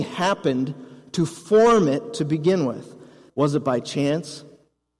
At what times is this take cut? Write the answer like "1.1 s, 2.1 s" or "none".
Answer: 3.3 s